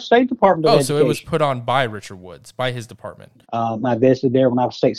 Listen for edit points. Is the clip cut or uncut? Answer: cut